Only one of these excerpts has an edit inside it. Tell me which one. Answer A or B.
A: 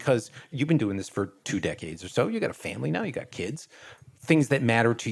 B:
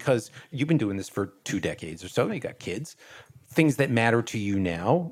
B